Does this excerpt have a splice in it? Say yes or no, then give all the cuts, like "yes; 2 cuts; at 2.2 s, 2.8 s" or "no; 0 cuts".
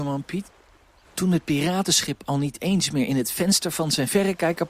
yes; 1 cut; at 1.0 s